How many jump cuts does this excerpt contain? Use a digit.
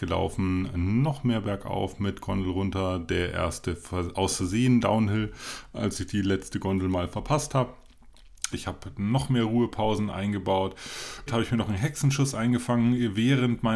2